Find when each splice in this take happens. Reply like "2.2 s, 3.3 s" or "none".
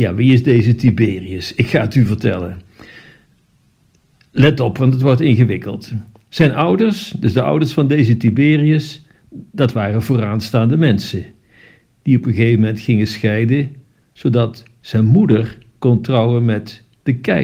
none

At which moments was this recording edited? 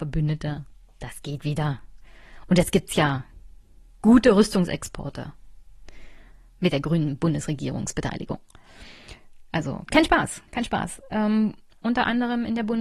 9.9 s, 11.7 s

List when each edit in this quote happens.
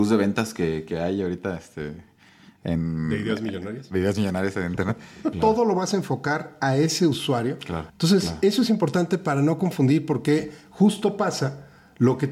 5.3 s, 7.9 s

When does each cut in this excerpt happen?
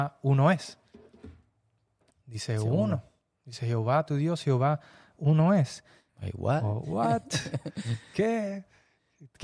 2.1 s, 6.1 s

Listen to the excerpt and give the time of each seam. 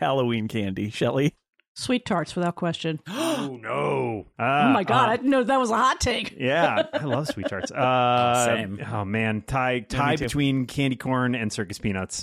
4.3 s

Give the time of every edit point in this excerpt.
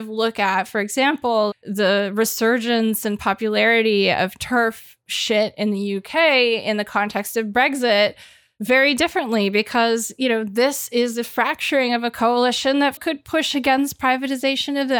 13.0 s

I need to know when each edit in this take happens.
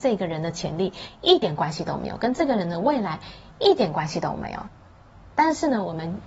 none

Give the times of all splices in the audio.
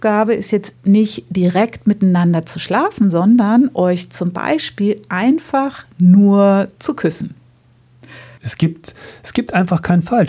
8.4 s

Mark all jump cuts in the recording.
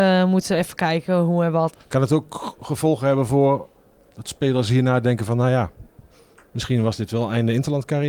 1.7 s

